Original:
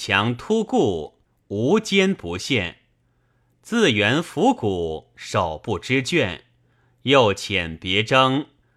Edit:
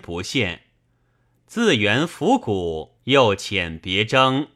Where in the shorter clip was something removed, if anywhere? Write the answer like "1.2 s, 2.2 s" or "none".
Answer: 3.0 s